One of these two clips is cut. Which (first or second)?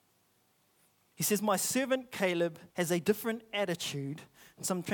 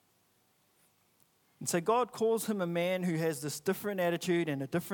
first